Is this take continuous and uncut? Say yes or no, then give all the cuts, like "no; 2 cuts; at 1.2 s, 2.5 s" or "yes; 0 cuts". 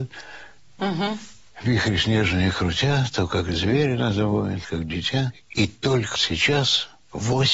no; 2 cuts; at 4.6 s, 6.2 s